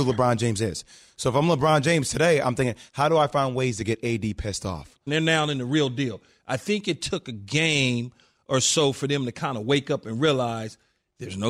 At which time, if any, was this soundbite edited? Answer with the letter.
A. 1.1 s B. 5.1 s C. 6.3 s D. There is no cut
B